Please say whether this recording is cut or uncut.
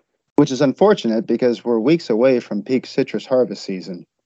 uncut